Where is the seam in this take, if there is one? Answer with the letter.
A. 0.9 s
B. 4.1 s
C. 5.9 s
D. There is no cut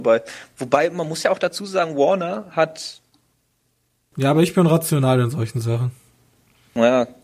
B